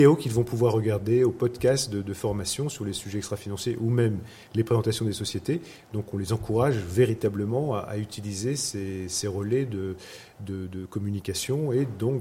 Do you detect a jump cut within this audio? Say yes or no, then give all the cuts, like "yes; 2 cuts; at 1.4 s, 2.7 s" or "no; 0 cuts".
no; 0 cuts